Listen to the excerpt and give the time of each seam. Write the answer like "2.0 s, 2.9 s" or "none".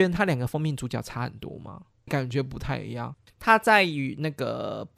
2.1 s